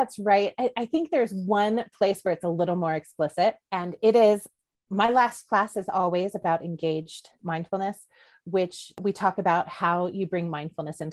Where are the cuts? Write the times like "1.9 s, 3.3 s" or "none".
3.6 s